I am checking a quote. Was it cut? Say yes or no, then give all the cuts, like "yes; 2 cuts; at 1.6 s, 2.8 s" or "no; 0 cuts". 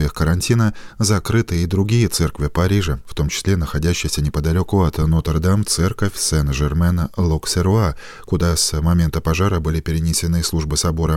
no; 0 cuts